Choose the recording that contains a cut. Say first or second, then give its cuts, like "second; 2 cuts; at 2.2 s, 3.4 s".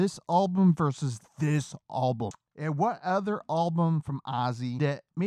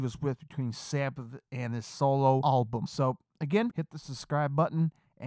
second; 1 cut; at 3.7 s